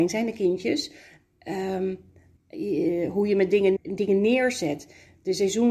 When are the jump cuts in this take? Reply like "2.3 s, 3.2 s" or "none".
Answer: 2.4 s, 3.8 s